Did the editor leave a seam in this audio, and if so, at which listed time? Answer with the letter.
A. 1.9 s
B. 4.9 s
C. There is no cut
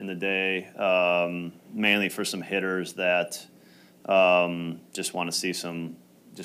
C